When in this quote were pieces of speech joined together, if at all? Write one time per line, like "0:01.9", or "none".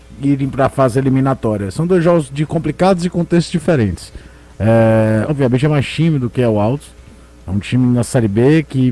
0:05.3